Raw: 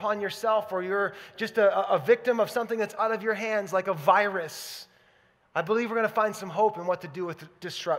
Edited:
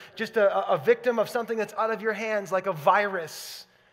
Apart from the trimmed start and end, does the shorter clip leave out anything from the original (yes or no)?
no